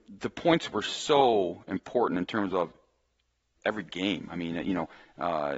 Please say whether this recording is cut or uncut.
cut